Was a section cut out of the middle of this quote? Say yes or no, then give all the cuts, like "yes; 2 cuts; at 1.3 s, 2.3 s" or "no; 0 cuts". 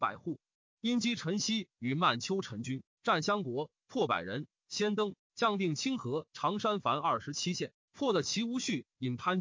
yes; 1 cut; at 7.7 s